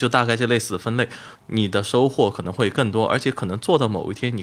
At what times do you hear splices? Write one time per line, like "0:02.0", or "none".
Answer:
0:01.4

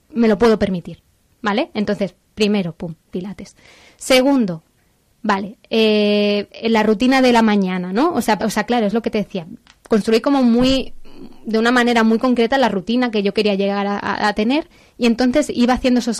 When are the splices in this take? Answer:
0:08.4

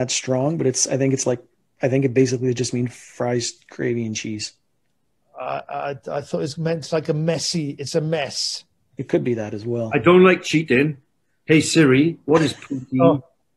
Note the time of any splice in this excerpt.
none

